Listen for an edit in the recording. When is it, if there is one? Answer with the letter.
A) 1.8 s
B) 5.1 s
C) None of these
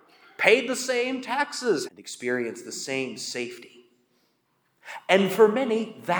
A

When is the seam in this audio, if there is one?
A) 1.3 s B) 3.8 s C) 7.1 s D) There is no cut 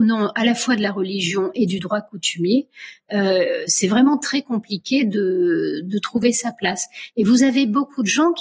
D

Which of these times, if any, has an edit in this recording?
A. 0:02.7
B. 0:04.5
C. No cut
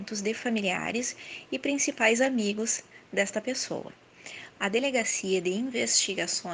B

